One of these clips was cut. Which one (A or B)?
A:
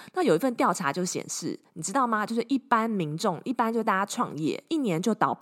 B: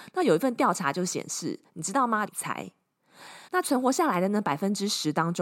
B